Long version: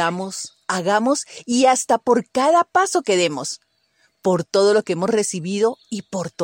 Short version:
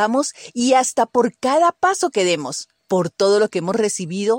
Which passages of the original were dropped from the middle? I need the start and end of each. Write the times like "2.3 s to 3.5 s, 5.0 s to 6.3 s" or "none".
3.7 s to 4.1 s